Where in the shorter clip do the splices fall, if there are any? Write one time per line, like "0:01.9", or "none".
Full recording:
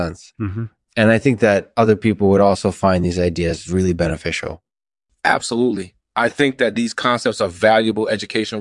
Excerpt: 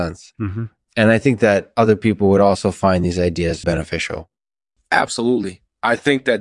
0:03.6